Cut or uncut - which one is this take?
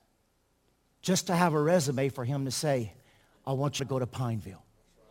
cut